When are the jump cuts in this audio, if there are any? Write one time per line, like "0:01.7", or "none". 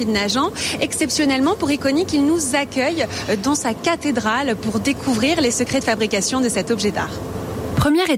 none